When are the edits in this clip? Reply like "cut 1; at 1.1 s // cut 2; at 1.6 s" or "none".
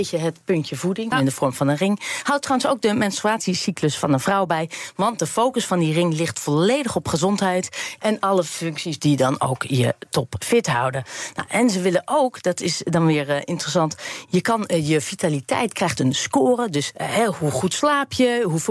cut 1; at 1.1 s // cut 2; at 16.9 s